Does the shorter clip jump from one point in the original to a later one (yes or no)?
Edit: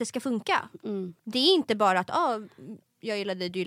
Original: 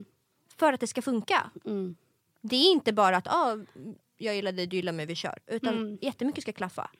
yes